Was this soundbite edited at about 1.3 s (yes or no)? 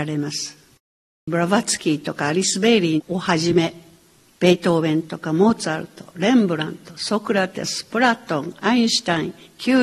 yes